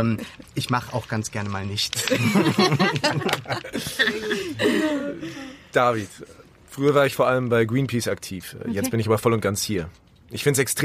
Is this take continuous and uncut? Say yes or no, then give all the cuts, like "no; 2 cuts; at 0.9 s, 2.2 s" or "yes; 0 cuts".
yes; 0 cuts